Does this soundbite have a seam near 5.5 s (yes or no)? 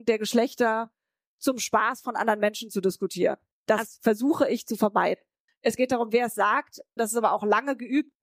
yes